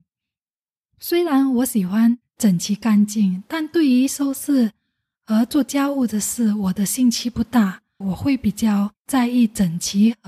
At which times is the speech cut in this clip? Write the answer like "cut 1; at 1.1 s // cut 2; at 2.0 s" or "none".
cut 1; at 8.0 s